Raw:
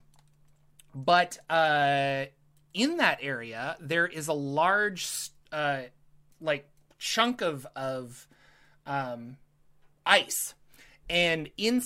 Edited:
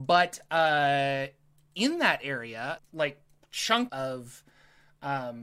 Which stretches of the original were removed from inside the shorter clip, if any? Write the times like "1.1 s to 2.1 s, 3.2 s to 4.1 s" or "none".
3.8 s to 6.3 s, 7.4 s to 7.7 s